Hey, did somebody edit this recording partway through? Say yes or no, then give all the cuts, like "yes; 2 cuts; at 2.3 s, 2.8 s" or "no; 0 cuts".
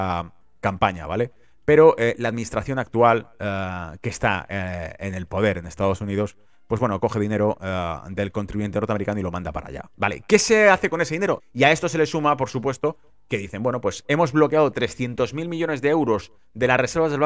yes; 1 cut; at 11.4 s